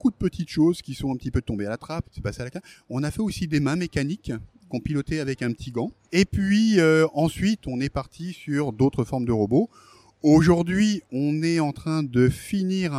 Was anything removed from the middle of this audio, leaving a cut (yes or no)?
yes